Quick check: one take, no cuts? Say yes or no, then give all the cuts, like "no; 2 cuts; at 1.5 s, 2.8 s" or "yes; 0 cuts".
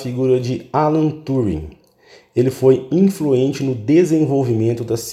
yes; 0 cuts